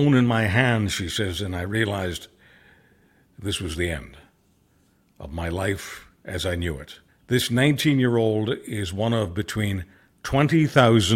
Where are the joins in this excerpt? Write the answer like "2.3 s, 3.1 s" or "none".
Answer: 7.1 s